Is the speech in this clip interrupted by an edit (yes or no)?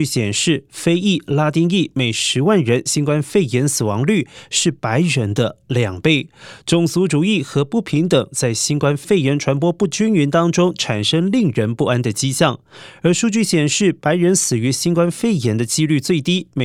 no